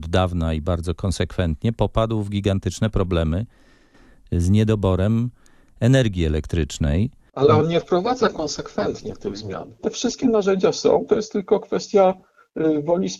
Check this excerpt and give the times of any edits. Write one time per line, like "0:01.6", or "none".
0:09.8